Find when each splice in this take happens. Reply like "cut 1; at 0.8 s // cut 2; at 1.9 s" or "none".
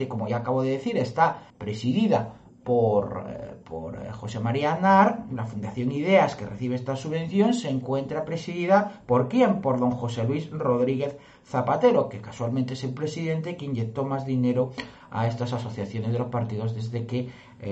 cut 1; at 1.5 s